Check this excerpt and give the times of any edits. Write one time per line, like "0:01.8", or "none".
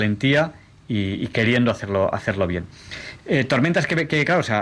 0:03.2